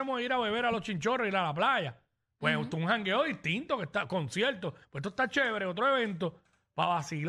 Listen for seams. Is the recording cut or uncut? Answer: uncut